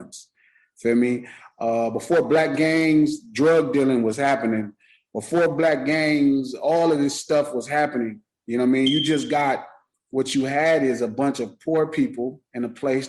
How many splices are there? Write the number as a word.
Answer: zero